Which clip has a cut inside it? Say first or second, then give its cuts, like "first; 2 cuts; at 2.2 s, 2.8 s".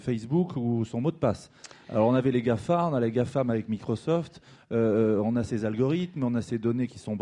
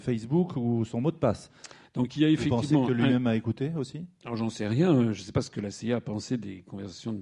second; 1 cut; at 1.9 s